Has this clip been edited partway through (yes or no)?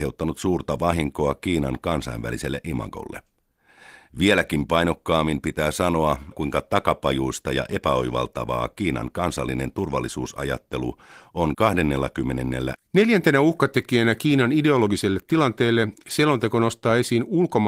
yes